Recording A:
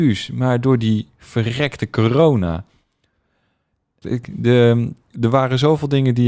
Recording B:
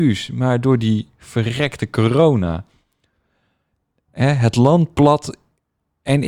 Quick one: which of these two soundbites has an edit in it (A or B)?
A